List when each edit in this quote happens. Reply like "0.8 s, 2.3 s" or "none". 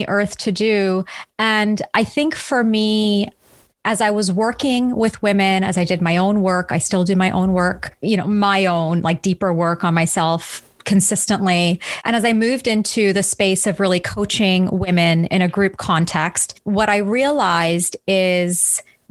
none